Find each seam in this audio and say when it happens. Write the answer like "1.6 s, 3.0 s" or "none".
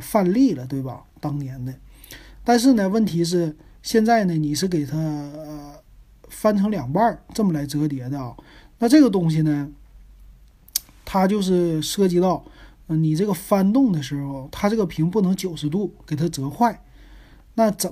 none